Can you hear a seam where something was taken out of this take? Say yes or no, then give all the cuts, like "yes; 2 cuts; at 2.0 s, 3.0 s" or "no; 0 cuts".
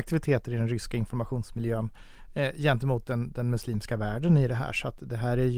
no; 0 cuts